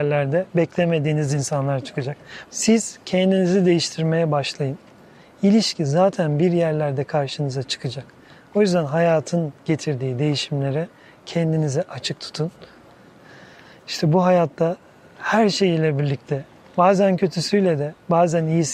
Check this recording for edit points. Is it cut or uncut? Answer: cut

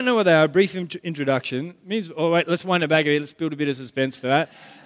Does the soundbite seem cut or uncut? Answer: uncut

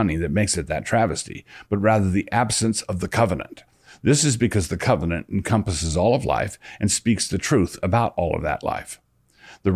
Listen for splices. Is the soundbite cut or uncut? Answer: uncut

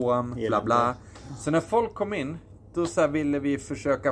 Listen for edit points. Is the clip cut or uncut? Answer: uncut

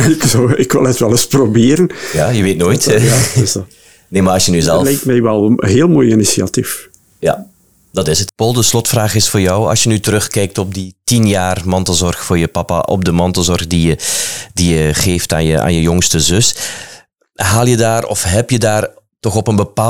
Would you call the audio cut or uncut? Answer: cut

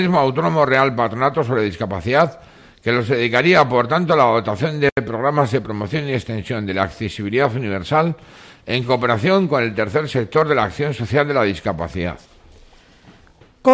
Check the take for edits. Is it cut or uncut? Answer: uncut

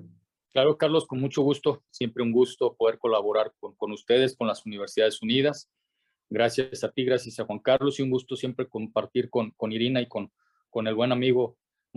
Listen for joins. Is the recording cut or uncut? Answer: cut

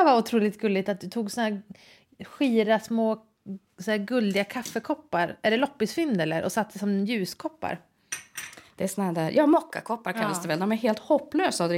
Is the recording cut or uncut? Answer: cut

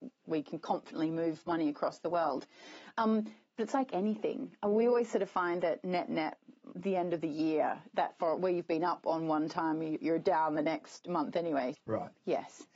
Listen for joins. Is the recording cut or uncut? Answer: cut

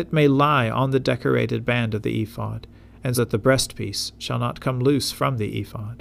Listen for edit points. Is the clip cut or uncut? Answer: cut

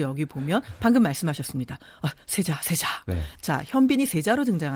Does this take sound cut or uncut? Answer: uncut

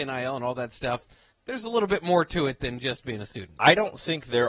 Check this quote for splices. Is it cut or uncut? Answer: cut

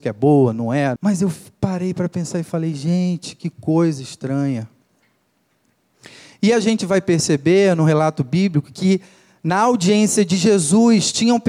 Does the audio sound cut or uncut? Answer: cut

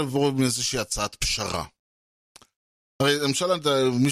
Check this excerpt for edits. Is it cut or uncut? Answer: cut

